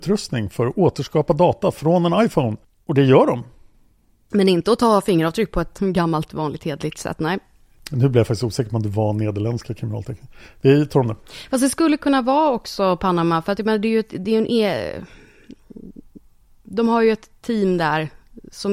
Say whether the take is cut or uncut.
uncut